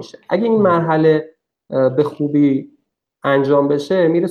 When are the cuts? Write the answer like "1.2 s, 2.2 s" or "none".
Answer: none

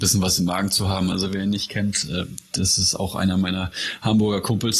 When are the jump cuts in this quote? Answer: 1.1 s

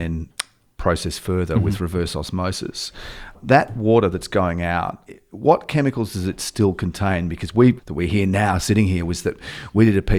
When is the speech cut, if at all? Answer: 7.8 s

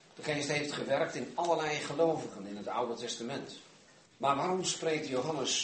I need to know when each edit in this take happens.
4.1 s

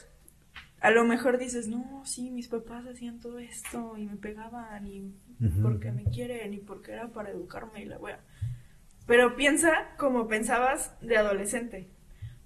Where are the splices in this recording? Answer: none

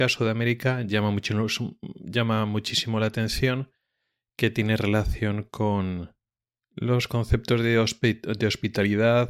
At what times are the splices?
none

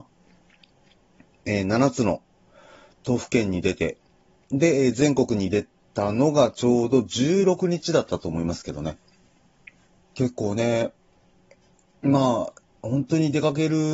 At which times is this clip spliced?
10.0 s

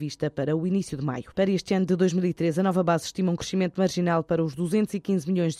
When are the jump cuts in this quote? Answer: 1.3 s

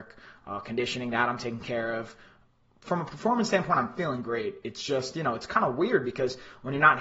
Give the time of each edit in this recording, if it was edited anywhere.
none

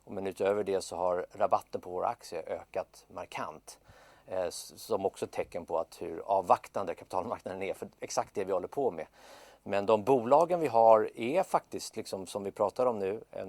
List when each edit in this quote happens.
none

